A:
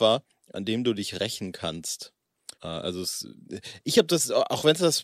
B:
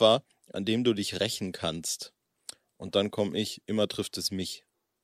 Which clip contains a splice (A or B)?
A